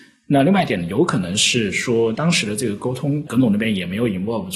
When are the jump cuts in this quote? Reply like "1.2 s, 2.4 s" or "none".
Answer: none